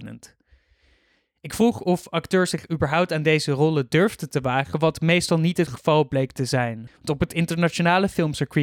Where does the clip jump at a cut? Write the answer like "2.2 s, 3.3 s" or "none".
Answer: 6.9 s